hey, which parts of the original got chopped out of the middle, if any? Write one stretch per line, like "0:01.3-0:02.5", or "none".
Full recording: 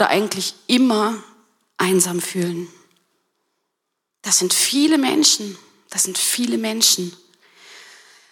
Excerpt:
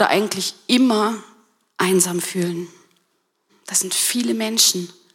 0:03.5-0:05.7